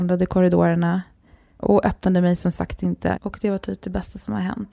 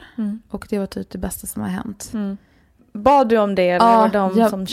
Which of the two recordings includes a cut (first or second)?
first